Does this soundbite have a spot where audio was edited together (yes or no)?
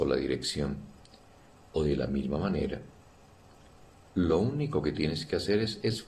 yes